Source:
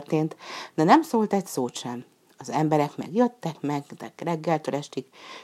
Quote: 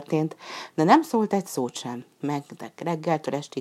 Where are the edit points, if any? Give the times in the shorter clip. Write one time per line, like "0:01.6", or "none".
0:02.2